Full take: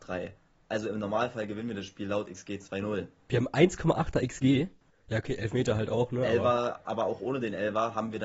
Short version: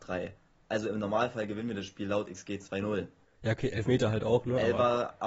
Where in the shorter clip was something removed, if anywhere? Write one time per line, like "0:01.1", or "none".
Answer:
0:03.2